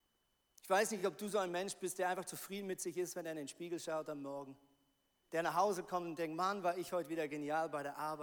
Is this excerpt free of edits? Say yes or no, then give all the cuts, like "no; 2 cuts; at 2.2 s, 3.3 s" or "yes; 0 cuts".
yes; 0 cuts